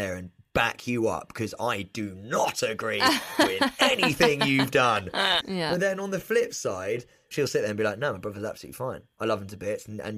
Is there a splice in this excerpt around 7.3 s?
yes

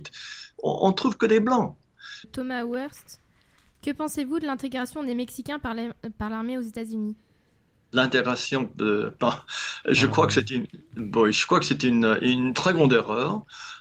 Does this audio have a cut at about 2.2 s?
yes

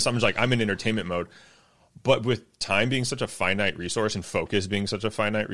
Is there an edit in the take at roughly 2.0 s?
no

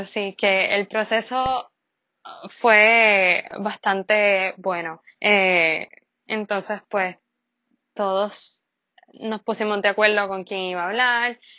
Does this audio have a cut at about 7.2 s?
no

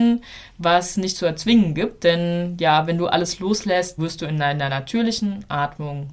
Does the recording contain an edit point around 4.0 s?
yes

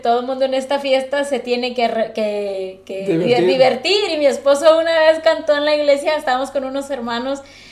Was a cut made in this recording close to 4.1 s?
no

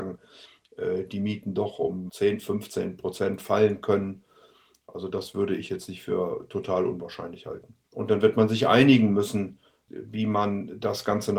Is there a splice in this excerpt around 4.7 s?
no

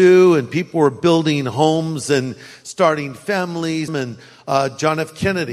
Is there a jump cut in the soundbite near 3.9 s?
yes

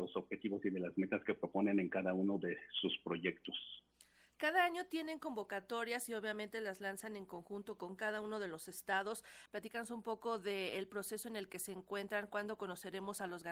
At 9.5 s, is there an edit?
yes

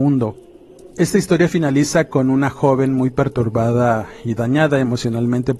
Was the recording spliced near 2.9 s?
no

